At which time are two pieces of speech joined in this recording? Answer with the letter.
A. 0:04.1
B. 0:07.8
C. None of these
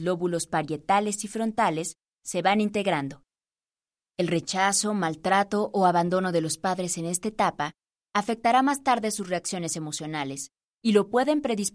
A